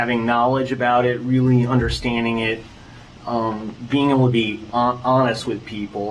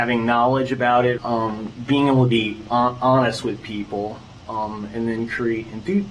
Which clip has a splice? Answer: second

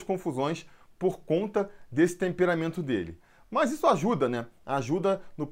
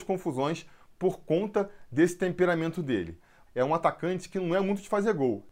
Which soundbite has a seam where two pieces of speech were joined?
second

